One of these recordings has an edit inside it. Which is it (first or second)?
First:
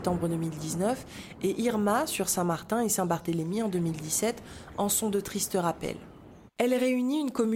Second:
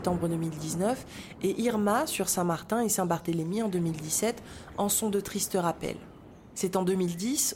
first